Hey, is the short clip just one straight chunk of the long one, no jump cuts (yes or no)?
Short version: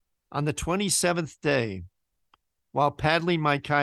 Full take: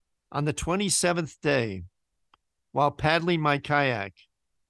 yes